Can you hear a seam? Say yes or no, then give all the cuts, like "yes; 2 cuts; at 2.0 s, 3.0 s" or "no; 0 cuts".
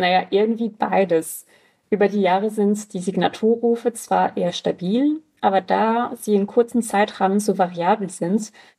no; 0 cuts